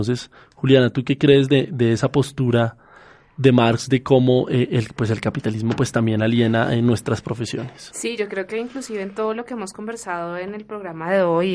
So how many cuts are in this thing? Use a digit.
0